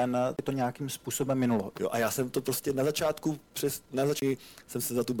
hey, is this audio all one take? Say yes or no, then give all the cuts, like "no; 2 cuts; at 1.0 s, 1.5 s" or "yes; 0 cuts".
no; 2 cuts; at 1.7 s, 3.5 s